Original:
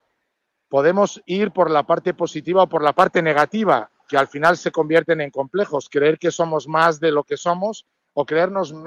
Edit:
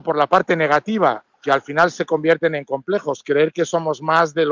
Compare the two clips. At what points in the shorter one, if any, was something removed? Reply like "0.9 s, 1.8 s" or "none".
none